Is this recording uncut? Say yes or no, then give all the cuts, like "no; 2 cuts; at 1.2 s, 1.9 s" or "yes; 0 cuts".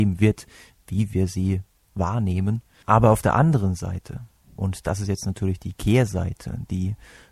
no; 1 cut; at 2.8 s